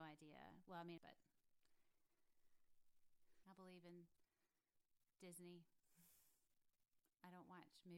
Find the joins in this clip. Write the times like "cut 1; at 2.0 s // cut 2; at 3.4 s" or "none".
cut 1; at 1.0 s // cut 2; at 3.4 s